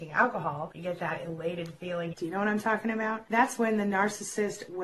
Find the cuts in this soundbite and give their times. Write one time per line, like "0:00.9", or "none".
0:02.1